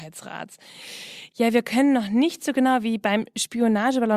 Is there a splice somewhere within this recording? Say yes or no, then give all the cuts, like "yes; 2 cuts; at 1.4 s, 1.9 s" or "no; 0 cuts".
no; 0 cuts